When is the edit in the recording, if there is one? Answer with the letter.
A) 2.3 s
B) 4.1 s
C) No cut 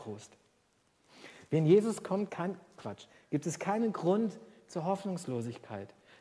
A